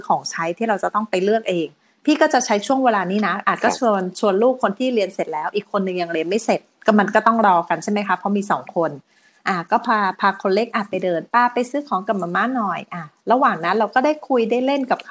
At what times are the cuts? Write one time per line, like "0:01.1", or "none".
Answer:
none

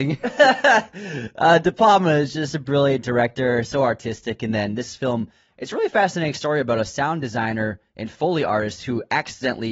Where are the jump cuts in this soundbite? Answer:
none

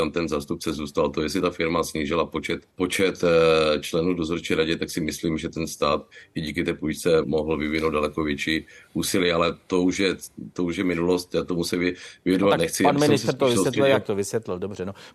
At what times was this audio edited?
0:02.7
0:07.2

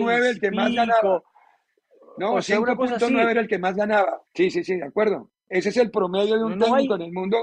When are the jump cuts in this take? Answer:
0:04.3

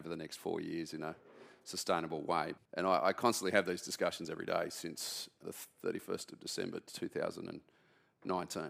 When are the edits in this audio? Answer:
0:02.6
0:05.4

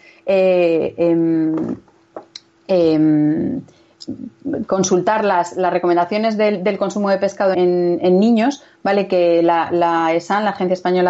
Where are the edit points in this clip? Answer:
0:07.5

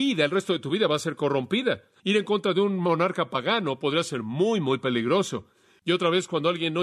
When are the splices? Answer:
0:02.0
0:05.8

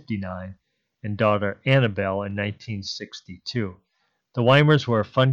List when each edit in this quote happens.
none

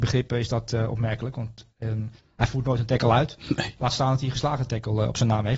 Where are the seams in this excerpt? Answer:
none

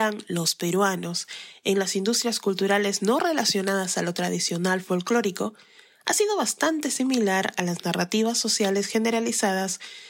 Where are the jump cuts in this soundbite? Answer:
none

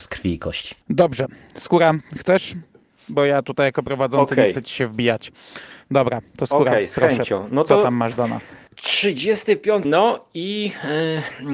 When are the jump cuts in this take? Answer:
0:09.8

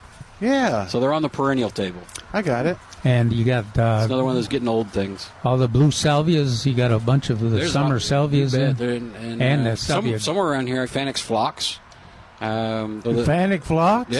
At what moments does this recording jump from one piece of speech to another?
0:10.8
0:13.0

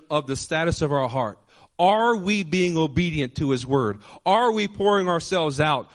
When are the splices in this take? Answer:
none

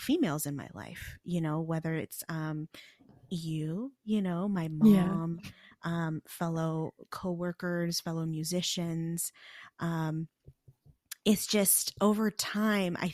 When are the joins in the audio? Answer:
none

